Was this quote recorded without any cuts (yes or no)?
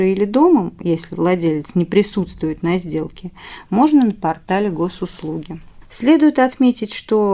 no